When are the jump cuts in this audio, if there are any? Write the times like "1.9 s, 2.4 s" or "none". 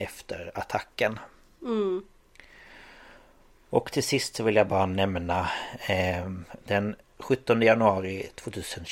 none